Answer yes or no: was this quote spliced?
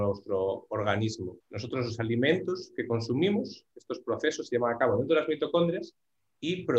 yes